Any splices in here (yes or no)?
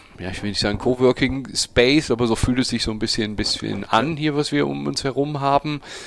no